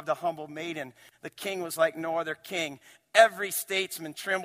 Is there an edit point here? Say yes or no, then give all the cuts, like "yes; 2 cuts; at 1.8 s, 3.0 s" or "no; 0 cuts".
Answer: no; 0 cuts